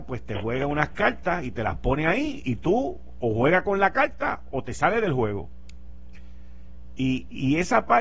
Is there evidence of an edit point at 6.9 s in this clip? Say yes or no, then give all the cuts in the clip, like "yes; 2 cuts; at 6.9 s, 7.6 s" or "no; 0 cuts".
no; 1 cut; at 3.2 s